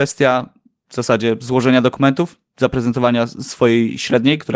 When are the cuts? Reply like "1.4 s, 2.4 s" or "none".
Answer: 2.5 s